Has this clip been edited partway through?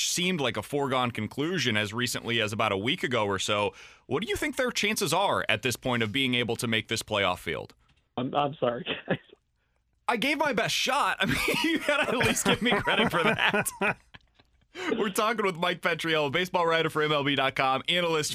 yes; 1 cut; at 8.2 s

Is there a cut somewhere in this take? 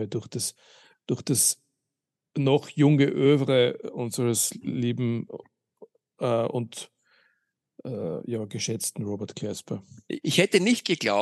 yes; 1 cut; at 10.2 s

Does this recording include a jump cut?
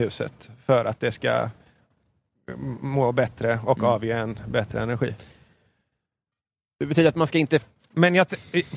no; 0 cuts

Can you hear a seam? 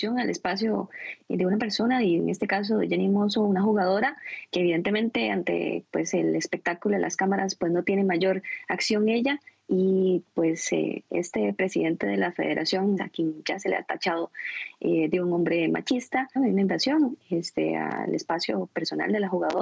yes; 2 cuts; at 13.0 s, 16.4 s

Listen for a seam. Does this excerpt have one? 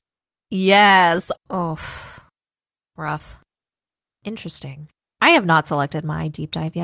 yes; 1 cut; at 1.4 s

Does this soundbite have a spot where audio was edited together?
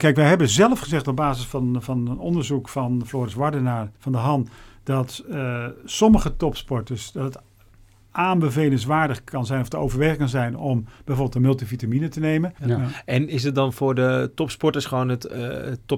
yes; 2 cuts; at 4.0 s, 12.6 s

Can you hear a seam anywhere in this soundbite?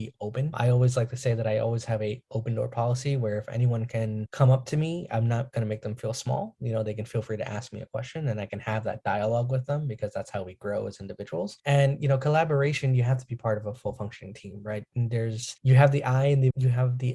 yes; 1 cut; at 15.6 s

